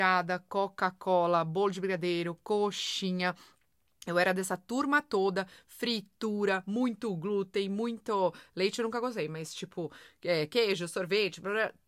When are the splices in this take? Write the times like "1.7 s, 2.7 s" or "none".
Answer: none